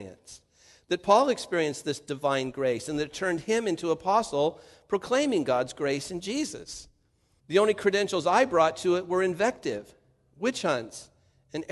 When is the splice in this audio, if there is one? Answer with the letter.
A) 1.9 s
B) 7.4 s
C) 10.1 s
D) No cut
B